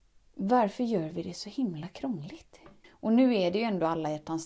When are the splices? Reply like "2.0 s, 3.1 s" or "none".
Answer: 2.8 s